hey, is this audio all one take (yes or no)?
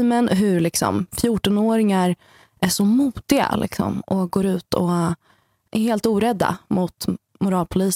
no